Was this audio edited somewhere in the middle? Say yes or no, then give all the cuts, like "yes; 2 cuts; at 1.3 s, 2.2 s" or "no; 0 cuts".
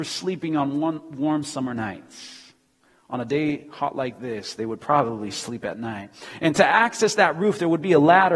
no; 0 cuts